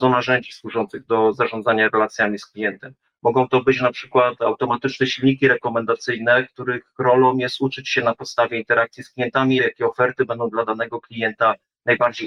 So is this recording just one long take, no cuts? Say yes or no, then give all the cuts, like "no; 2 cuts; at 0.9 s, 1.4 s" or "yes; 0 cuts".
no; 1 cut; at 9.6 s